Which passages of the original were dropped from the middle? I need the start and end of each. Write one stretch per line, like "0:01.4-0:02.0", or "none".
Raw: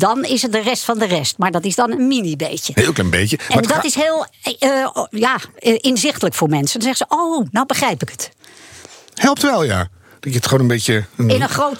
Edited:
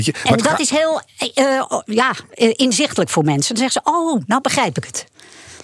none